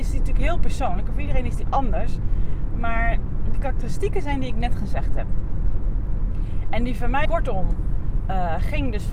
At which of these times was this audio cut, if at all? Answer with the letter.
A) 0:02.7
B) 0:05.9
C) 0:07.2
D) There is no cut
C